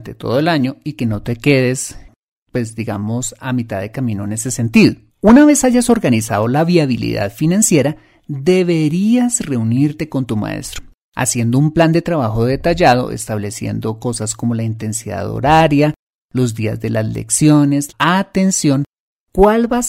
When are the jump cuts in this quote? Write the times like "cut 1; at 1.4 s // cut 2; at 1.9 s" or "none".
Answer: cut 1; at 5.1 s // cut 2; at 17.9 s